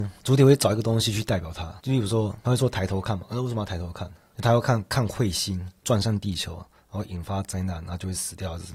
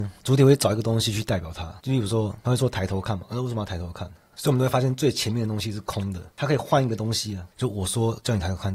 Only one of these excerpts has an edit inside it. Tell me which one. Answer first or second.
second